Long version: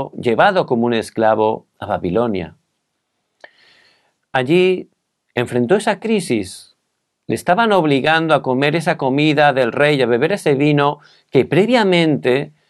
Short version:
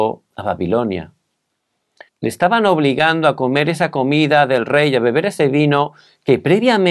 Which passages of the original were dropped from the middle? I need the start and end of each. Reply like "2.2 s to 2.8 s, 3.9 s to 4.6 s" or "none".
3.5 s to 7.1 s